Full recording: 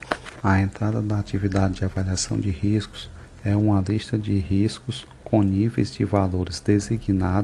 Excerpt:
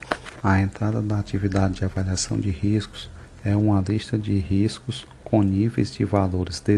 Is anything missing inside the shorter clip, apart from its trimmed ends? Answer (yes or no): no